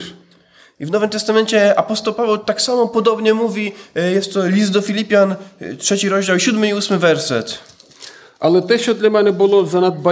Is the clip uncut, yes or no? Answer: yes